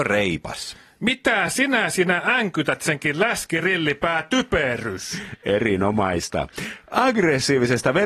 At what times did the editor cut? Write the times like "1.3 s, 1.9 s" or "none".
none